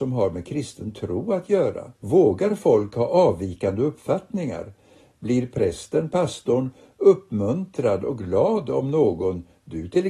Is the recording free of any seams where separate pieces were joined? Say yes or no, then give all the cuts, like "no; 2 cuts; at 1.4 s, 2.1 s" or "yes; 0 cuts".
no; 1 cut; at 1.9 s